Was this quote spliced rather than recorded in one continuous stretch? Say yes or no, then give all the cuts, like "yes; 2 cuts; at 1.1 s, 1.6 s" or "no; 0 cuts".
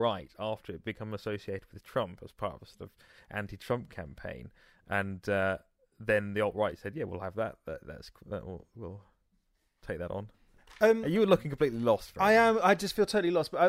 no; 0 cuts